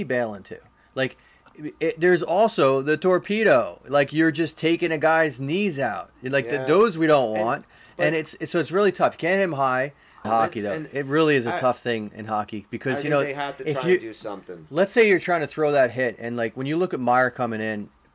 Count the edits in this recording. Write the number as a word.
one